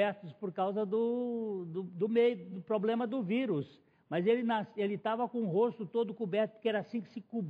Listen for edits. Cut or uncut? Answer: uncut